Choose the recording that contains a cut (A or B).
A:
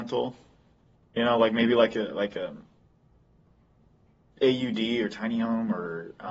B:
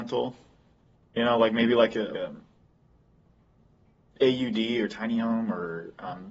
B